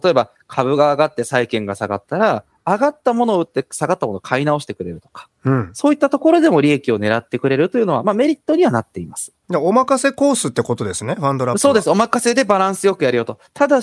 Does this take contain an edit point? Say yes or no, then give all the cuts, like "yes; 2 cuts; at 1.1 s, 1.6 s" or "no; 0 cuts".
no; 0 cuts